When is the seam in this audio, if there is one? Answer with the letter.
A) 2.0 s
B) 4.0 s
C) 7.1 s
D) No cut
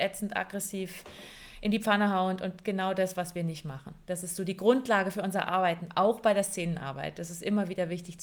D